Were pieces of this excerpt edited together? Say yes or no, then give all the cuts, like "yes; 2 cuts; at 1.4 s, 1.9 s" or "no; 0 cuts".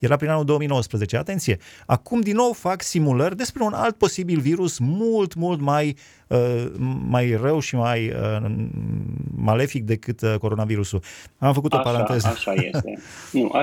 yes; 1 cut; at 11.3 s